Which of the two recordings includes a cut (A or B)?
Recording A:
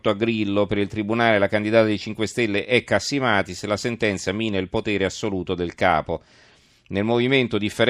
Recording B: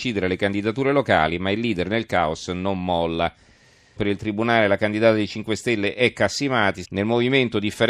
B